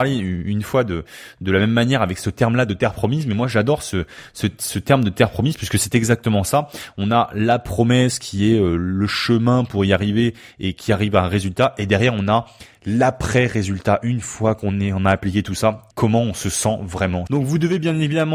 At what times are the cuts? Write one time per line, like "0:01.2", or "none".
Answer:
0:15.9
0:17.3

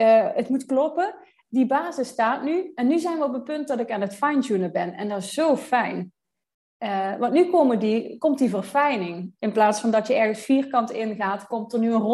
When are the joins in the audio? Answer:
none

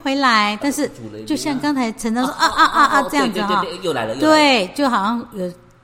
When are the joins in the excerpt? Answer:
none

